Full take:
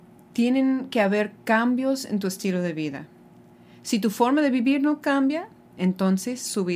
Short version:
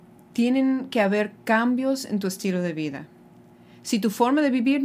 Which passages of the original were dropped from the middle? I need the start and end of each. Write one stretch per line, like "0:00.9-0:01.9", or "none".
none